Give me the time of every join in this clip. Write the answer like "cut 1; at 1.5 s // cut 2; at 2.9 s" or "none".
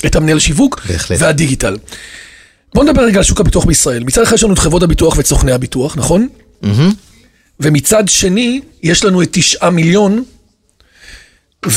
none